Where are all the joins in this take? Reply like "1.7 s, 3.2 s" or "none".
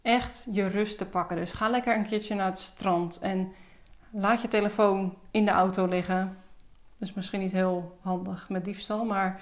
none